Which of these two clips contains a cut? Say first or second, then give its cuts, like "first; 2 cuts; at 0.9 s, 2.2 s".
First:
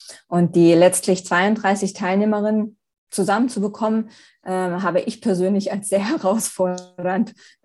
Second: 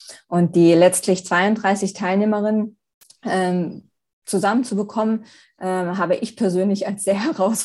first; 1 cut; at 3.0 s